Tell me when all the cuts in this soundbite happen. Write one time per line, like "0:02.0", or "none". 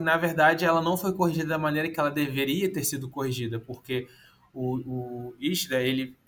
none